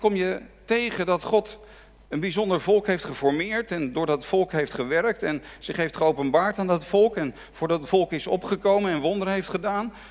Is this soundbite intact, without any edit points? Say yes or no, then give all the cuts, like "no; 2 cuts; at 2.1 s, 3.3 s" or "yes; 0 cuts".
yes; 0 cuts